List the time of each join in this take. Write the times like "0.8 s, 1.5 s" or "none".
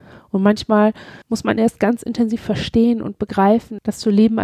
1.2 s